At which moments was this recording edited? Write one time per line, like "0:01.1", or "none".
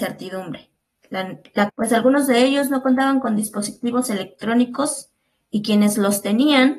0:01.7